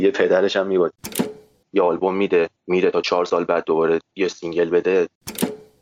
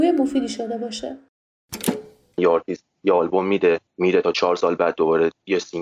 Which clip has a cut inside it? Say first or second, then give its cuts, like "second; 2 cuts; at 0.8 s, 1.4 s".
first; 1 cut; at 1.6 s